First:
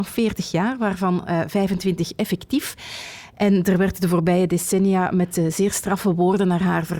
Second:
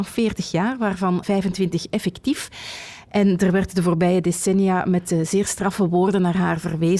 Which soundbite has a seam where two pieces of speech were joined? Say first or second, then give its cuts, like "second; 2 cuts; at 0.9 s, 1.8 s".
second; 1 cut; at 1.2 s